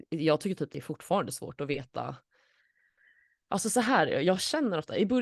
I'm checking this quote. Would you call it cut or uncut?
uncut